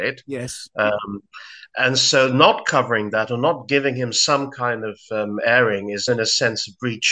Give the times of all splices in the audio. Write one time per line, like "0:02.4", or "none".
0:06.1